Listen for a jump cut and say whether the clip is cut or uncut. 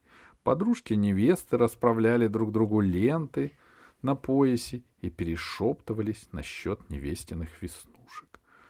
uncut